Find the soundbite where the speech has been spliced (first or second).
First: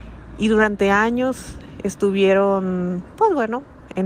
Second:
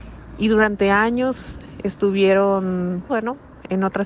second